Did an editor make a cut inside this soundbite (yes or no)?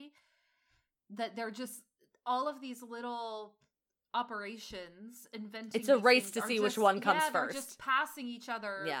no